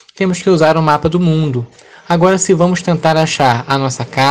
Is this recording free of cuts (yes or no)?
yes